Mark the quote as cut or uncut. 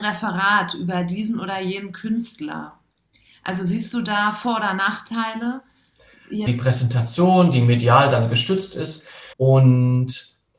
cut